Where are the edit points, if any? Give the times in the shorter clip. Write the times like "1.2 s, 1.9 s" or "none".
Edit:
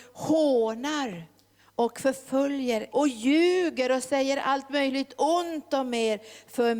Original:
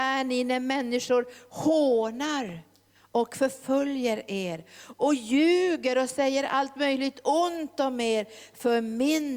2.9 s